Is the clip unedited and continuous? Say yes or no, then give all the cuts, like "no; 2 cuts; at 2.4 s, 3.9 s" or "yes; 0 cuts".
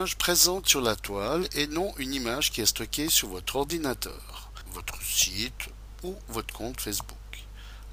no; 1 cut; at 4.7 s